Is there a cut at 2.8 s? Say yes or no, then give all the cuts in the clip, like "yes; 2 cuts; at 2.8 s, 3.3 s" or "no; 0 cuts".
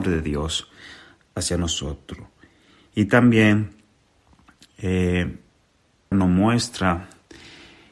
no; 1 cut; at 6.1 s